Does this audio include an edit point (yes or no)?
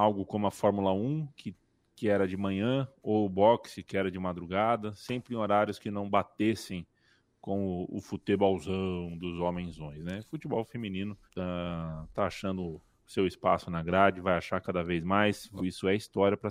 yes